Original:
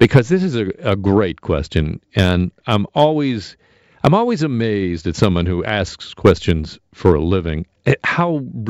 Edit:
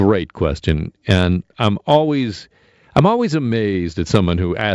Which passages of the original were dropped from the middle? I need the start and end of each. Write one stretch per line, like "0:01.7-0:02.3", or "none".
none